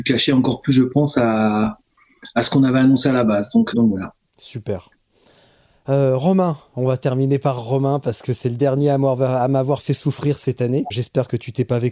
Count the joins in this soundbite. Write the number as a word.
two